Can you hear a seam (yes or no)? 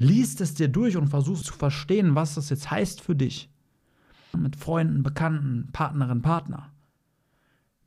yes